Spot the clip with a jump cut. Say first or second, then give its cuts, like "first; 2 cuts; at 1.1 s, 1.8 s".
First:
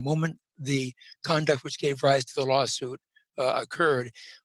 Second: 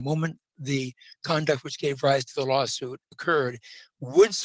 second; 1 cut; at 3.1 s